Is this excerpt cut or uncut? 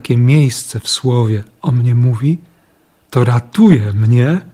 uncut